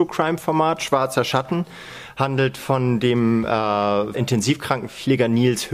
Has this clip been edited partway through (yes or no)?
yes